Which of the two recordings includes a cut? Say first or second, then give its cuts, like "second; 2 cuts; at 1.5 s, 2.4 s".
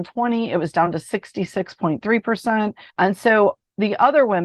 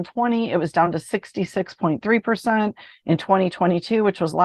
first; 1 cut; at 2.9 s